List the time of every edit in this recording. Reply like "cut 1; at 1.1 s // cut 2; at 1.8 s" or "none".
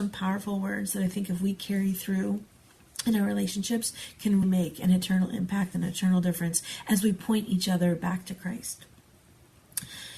cut 1; at 4.4 s